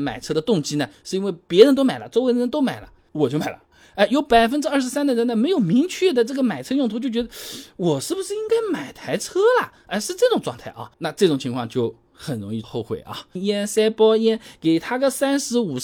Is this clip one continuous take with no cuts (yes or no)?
no